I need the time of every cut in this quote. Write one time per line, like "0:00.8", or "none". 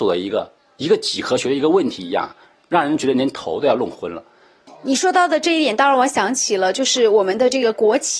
none

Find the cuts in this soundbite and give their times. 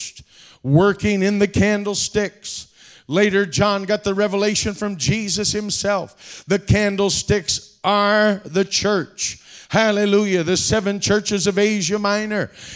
none

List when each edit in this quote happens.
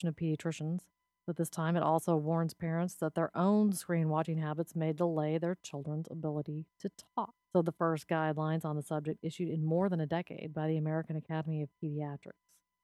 0:07.4

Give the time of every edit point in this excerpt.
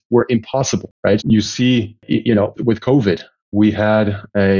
0:01.2
0:02.5

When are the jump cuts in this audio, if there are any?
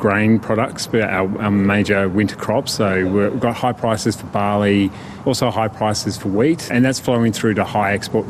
0:05.2
0:06.7

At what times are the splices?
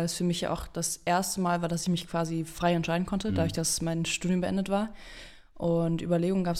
none

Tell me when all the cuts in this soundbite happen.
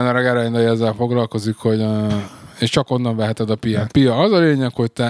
0:03.9

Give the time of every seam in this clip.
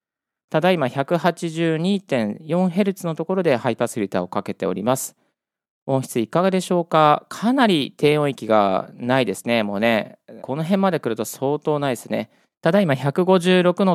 0:10.4
0:12.5

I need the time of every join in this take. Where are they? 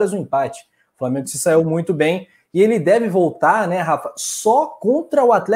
none

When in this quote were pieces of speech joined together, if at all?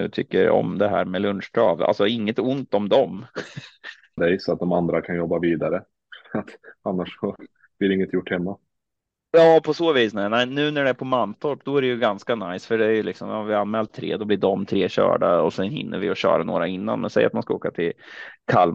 0:04.2

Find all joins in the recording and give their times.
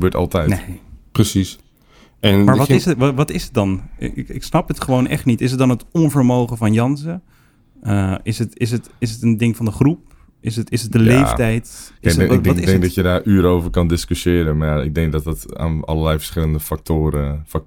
none

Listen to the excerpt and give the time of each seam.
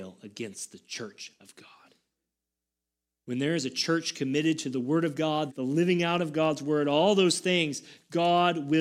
0:05.5

